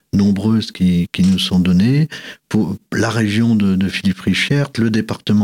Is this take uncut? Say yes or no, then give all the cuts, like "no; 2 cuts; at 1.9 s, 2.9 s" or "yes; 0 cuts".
yes; 0 cuts